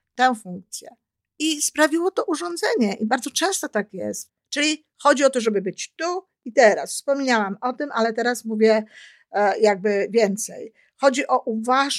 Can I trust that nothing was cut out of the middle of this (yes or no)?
no